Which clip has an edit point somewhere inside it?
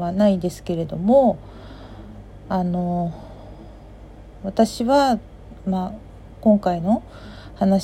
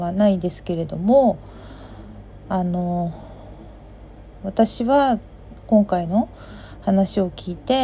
second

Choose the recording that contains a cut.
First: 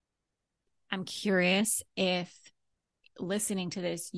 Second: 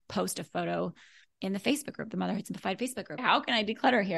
second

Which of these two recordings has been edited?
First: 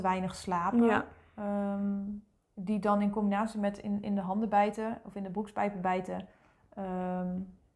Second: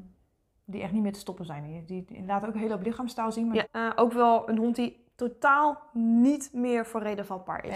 second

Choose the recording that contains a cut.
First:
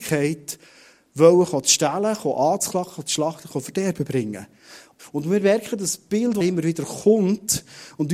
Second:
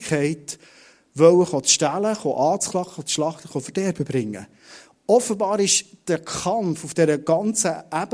first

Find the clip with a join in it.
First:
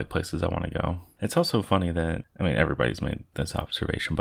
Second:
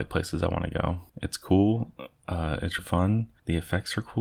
second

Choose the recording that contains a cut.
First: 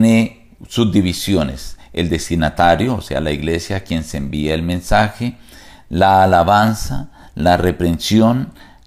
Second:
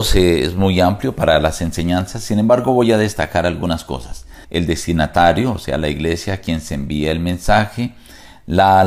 second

